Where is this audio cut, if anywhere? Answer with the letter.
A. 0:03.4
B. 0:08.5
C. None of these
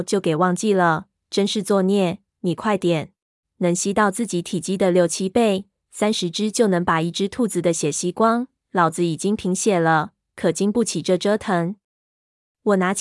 A